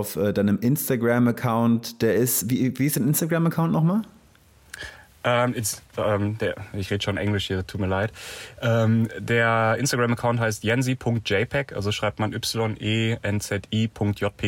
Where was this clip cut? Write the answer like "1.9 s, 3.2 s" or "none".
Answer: none